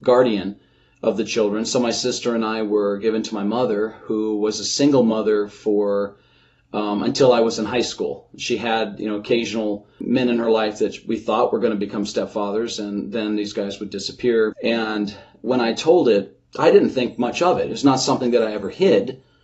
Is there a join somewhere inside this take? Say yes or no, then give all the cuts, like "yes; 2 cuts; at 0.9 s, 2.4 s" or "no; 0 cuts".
yes; 1 cut; at 14.5 s